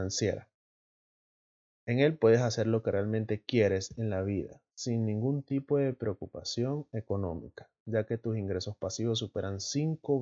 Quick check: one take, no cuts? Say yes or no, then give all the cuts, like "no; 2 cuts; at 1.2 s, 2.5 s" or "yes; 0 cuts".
no; 1 cut; at 1.8 s